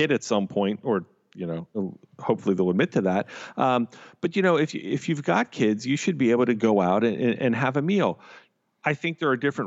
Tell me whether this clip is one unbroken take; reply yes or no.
yes